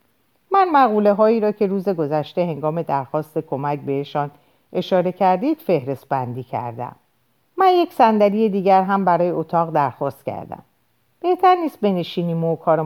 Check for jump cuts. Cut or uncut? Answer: cut